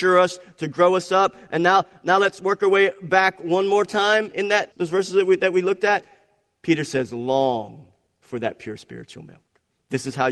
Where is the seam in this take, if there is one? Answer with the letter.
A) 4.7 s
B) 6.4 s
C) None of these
A